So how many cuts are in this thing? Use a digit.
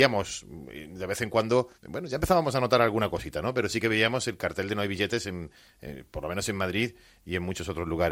1